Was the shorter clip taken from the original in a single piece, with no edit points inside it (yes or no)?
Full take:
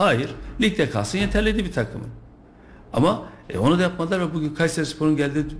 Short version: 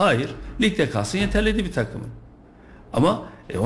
yes